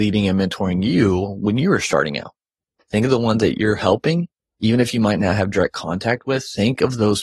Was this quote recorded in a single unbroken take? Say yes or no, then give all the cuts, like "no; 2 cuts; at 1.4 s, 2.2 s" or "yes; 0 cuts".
no; 1 cut; at 2.8 s